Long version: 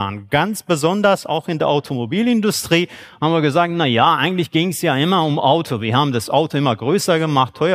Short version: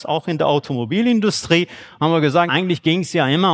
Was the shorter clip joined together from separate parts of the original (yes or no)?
yes